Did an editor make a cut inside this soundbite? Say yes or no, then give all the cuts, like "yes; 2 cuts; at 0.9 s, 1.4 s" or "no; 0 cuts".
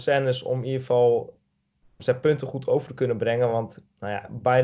no; 0 cuts